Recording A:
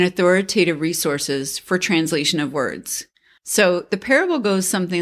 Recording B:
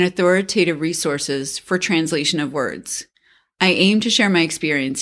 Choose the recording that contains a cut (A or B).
A